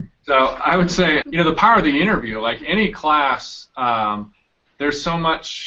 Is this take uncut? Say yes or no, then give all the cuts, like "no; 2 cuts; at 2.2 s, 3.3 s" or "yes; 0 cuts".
no; 1 cut; at 1.2 s